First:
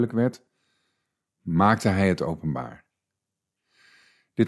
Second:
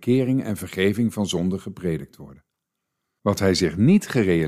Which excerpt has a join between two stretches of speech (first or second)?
second